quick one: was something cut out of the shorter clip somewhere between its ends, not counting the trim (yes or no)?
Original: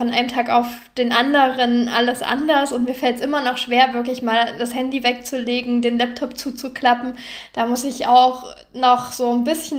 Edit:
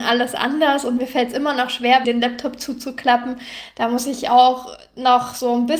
yes